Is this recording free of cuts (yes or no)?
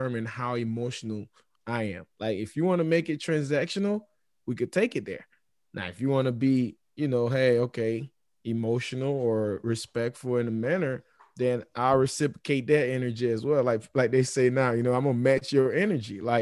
no